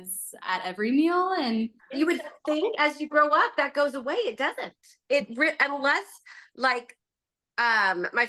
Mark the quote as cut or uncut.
cut